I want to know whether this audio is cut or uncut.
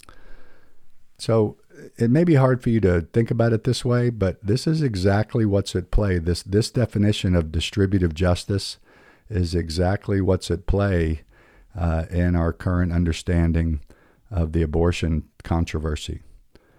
uncut